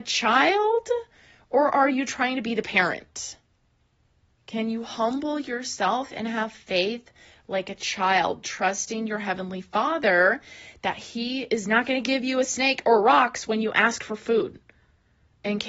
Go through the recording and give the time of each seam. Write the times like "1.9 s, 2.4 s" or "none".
none